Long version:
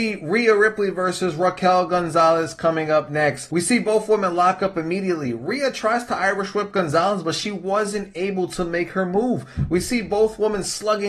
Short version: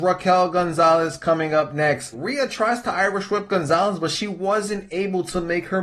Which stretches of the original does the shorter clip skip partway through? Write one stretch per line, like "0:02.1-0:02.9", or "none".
0:03.5-0:05.4